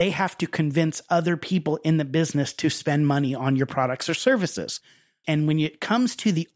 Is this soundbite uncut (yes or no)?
no